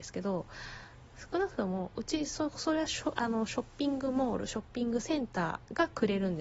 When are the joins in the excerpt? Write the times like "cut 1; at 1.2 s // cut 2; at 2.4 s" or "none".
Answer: none